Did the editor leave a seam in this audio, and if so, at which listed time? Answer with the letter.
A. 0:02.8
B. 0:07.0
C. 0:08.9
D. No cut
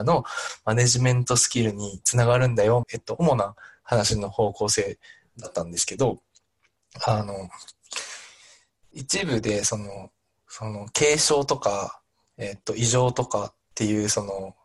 A